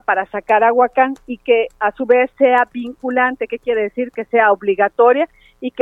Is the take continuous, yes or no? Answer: yes